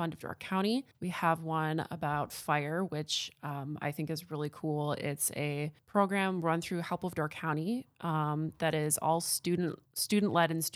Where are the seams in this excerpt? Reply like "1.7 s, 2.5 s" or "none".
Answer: none